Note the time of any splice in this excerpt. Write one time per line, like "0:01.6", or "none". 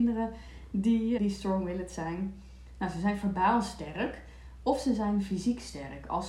0:01.2